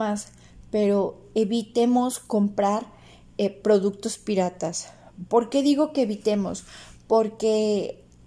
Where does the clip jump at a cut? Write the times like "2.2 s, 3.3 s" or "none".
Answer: none